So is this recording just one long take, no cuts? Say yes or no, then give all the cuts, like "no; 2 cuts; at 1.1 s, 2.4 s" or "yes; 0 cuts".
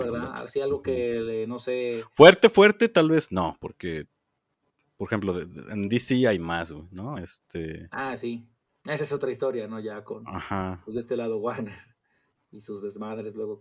yes; 0 cuts